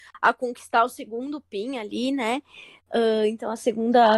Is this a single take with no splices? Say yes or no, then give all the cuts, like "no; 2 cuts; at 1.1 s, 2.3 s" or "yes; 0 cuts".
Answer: yes; 0 cuts